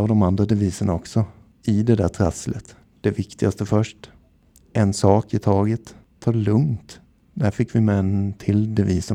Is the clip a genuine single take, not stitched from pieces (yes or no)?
yes